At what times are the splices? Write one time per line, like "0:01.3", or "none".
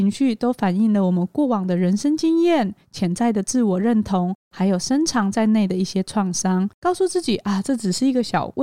0:06.8